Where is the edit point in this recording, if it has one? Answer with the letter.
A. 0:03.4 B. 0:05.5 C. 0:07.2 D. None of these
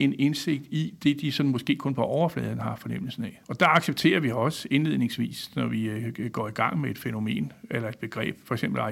A